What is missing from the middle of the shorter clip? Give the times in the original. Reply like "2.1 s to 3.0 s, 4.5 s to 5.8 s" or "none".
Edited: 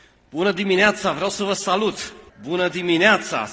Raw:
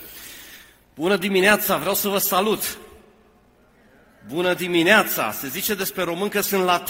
2.9 s to 4.2 s